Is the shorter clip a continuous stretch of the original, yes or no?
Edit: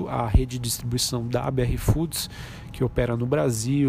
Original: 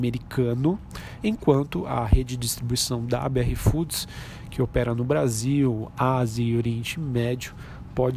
yes